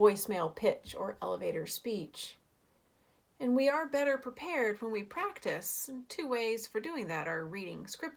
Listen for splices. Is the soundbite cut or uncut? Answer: uncut